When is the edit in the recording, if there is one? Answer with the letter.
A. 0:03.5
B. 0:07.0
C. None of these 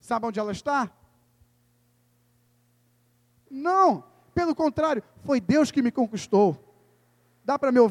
A